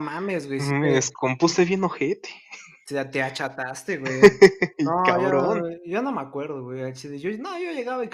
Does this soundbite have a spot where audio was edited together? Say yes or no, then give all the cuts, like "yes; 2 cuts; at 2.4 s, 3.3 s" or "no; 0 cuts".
no; 0 cuts